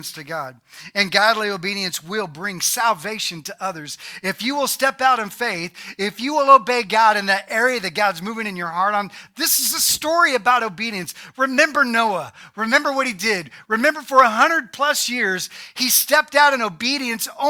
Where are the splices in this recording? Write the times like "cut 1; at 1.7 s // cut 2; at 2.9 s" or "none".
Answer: none